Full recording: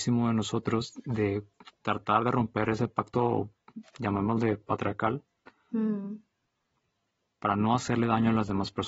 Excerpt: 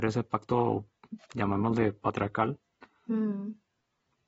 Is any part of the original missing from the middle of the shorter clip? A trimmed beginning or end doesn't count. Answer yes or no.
no